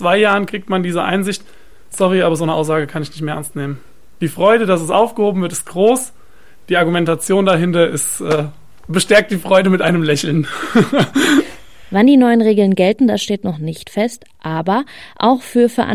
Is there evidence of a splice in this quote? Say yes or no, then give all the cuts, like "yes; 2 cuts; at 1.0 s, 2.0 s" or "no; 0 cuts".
no; 0 cuts